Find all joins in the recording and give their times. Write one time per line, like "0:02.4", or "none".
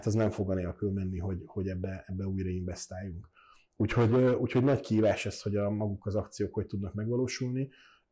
none